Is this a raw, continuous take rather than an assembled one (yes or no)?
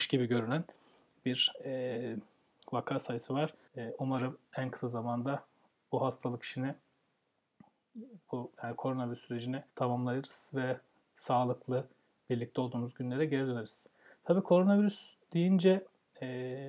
no